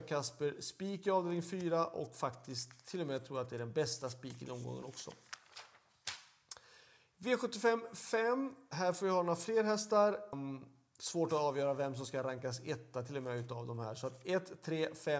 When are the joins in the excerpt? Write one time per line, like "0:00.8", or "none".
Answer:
0:10.3

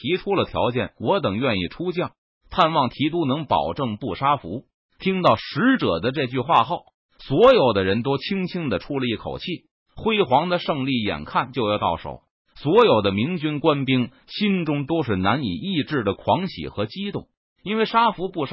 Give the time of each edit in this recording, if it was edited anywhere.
0:17.4

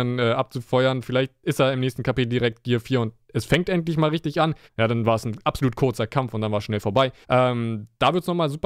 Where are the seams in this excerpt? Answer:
0:04.7
0:07.2

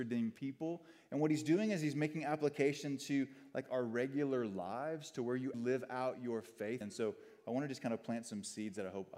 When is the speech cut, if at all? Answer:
0:05.5
0:06.8

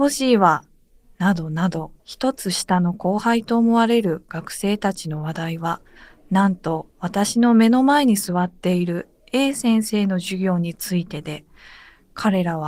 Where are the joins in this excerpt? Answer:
0:02.0
0:06.9

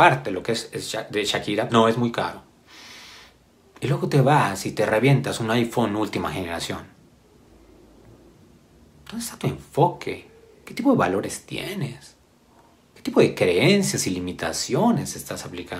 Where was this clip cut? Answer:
0:01.7

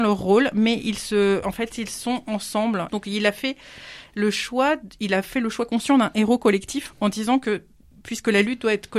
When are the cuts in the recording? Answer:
0:02.9
0:06.9

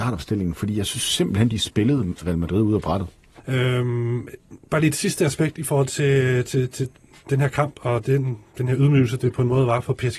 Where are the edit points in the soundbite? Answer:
0:03.4

